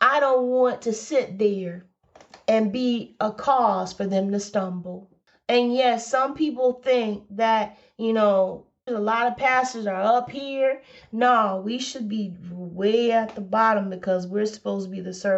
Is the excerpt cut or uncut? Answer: cut